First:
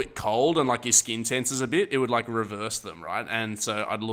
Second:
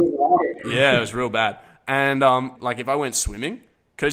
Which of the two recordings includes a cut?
second; 1 cut; at 2.6 s

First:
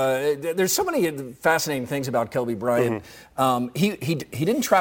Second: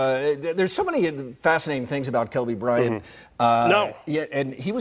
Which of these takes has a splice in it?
second; 1 cut; at 3.3 s

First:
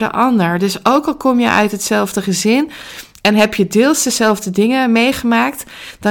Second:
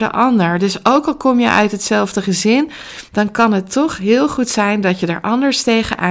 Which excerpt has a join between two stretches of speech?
second; 1 cut; at 3.1 s

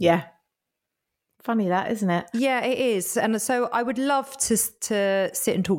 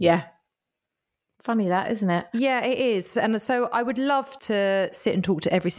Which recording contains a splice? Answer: second; 1 cut; at 4.4 s

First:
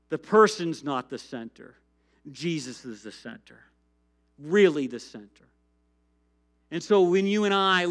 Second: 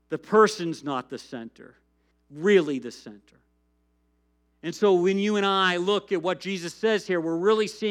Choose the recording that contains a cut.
second; 1 cut; at 2.1 s

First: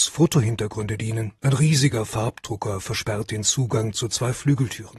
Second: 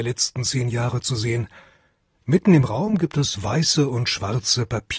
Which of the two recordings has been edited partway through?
first; 1 cut; at 1.4 s

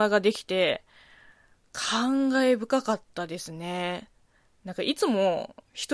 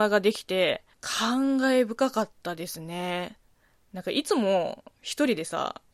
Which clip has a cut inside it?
second; 1 cut; at 0.9 s

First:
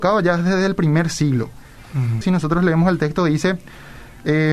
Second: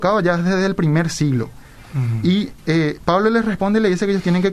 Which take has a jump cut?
first; 1 cut; at 2.2 s

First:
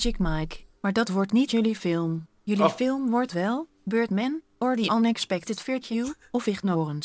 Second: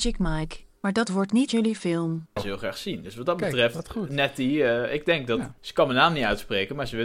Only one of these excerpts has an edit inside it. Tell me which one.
second; 2 cuts; at 2.4 s, 5.6 s

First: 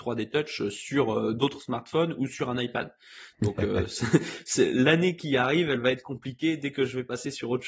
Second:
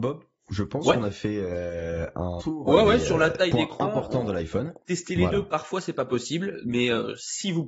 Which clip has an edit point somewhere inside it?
second; 2 cuts; at 2.4 s, 4.8 s

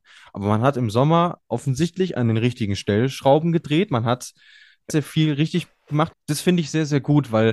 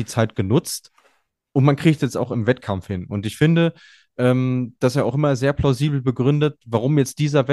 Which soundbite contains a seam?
first; 2 cuts; at 4.9 s, 6.1 s

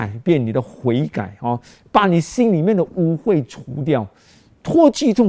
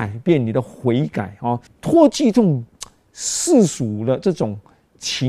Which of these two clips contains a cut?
second; 1 cut; at 1.7 s

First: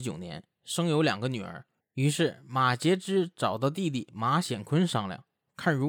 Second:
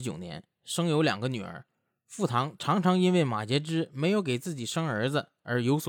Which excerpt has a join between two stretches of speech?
first; 1 cut; at 1.8 s

